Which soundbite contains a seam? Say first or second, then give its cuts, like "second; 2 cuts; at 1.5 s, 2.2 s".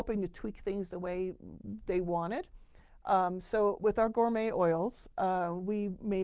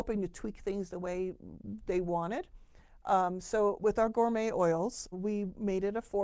second; 1 cut; at 5.1 s